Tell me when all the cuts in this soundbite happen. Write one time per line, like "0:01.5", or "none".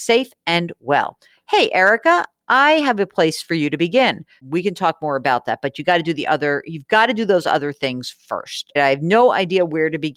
0:04.4
0:08.8

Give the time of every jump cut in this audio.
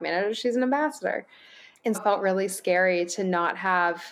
0:01.9

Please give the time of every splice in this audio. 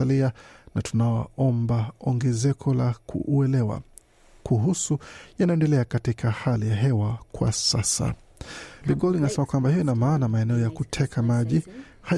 0:08.8

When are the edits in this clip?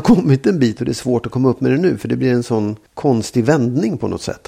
0:02.9

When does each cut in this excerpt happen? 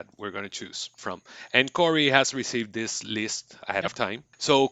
0:03.6

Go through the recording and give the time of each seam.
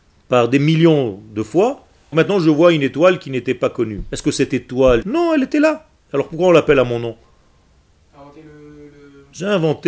0:02.1
0:05.0

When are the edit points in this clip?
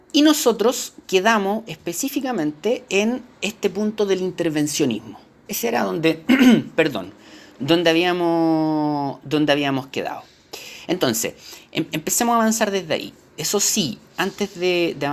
none

